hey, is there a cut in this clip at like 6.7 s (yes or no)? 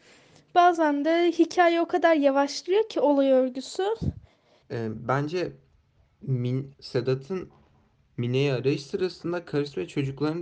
yes